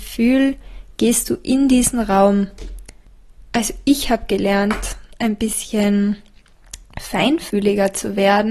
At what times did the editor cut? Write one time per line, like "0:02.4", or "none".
none